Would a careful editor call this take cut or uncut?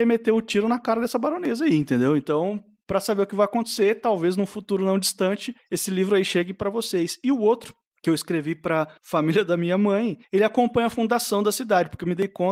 uncut